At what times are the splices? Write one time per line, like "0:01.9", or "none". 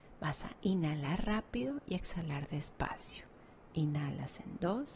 0:03.7